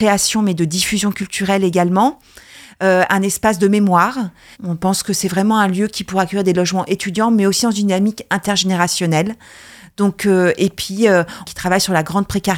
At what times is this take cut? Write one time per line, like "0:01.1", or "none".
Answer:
0:04.5
0:11.4